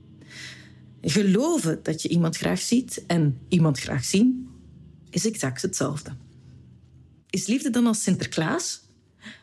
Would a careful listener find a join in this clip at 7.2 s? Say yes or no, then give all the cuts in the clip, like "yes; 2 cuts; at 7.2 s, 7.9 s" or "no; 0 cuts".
yes; 1 cut; at 7.2 s